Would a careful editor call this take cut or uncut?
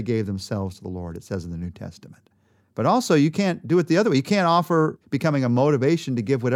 cut